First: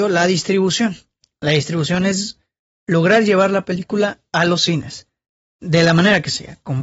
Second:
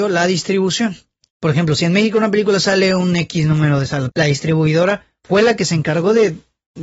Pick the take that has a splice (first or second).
second